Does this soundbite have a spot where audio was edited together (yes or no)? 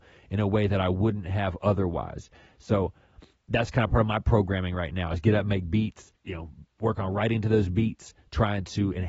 yes